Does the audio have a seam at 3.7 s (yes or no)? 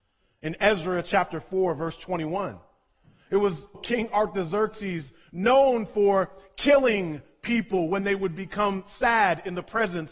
yes